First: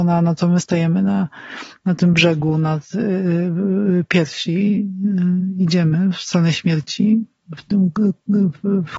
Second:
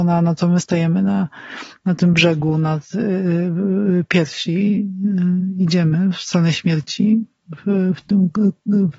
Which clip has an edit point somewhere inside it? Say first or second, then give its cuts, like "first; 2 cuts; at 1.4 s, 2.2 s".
first; 1 cut; at 7.6 s